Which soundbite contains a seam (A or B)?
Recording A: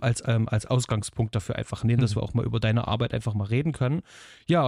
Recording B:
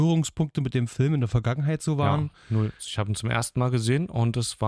B